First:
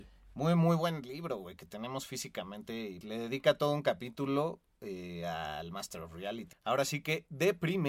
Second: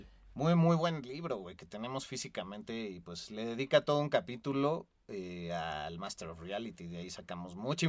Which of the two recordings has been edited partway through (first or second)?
first